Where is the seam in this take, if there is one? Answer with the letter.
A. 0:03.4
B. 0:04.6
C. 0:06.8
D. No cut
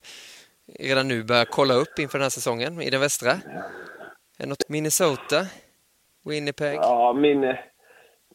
B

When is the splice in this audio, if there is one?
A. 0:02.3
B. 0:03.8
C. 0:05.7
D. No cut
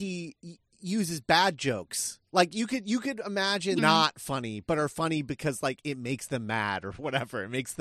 B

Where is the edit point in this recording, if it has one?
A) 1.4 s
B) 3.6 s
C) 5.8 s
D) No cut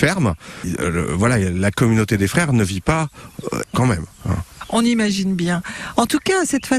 B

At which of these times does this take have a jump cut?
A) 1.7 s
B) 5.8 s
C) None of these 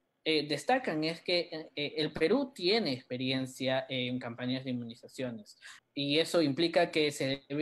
B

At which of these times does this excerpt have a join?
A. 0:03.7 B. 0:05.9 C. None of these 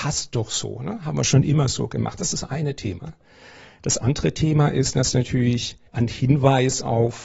B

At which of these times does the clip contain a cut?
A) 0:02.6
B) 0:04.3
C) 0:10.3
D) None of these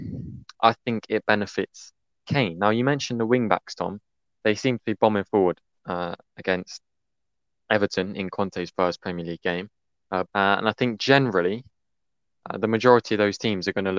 C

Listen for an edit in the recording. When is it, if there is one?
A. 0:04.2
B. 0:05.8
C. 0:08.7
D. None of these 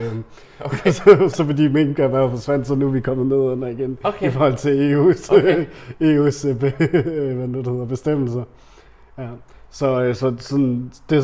D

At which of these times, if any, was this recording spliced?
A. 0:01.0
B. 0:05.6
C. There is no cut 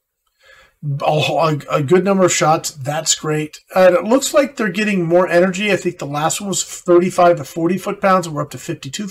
C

